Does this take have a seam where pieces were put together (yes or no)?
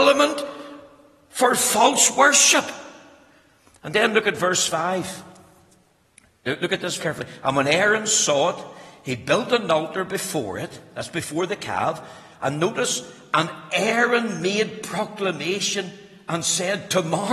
yes